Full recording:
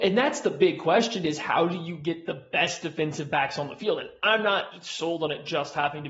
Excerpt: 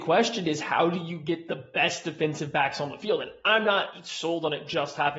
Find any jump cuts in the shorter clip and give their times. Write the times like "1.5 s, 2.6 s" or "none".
none